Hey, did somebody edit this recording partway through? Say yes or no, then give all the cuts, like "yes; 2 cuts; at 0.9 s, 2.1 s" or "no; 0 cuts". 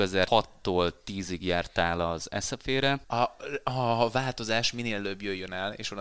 yes; 1 cut; at 3.0 s